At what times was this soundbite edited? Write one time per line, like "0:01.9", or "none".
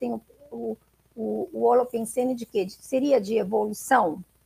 none